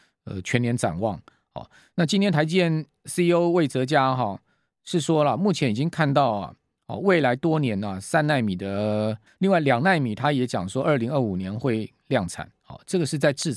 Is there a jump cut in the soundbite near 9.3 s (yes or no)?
yes